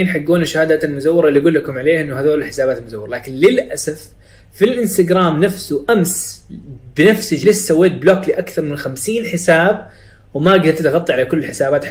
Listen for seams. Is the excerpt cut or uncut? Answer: uncut